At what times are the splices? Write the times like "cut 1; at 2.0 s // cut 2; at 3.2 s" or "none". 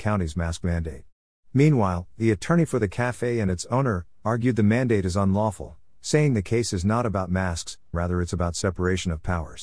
cut 1; at 4.2 s // cut 2; at 7.9 s